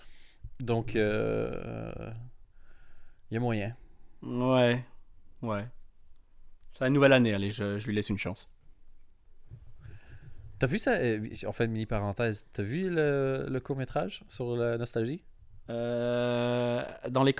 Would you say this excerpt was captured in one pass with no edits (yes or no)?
no